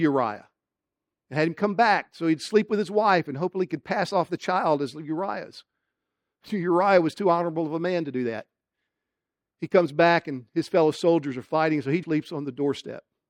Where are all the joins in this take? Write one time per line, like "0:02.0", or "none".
0:12.0